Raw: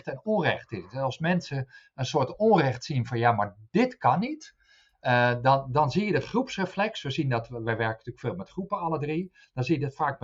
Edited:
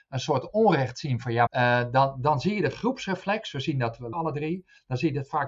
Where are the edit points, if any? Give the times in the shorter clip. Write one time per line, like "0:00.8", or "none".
0:01.5
0:04.1